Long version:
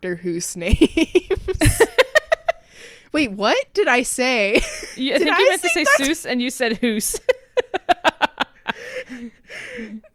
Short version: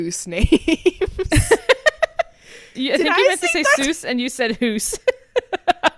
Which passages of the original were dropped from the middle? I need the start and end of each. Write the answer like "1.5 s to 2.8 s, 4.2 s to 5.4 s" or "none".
3.0 s to 5.0 s